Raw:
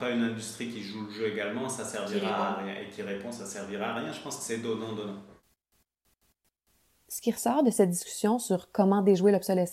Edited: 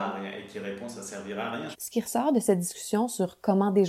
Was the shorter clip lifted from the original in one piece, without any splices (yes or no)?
no